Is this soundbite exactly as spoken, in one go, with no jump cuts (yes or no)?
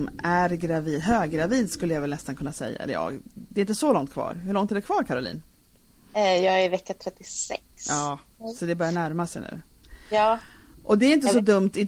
yes